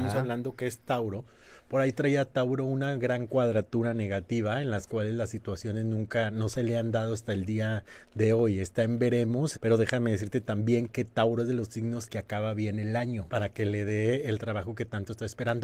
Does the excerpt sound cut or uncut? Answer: cut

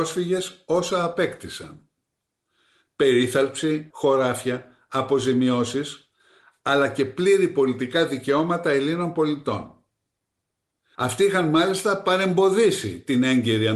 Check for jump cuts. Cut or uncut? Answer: cut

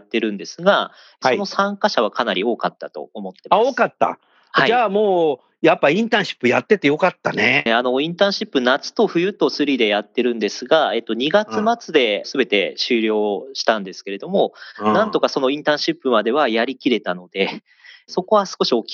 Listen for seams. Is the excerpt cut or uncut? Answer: cut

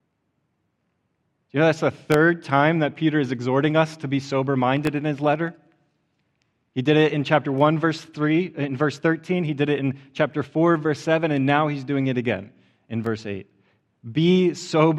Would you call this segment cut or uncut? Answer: uncut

